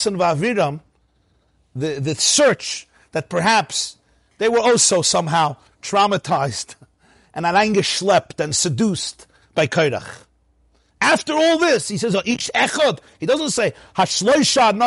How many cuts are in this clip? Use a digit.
0